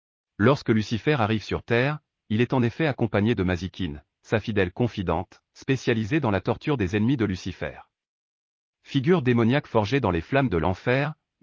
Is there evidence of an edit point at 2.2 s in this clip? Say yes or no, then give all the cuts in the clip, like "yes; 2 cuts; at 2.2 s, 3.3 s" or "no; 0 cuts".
yes; 1 cut; at 2.2 s